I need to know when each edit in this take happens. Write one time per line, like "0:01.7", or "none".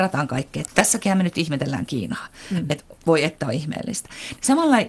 none